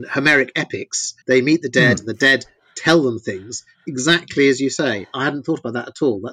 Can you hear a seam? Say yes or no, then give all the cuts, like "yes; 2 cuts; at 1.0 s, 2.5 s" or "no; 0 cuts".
yes; 1 cut; at 1.2 s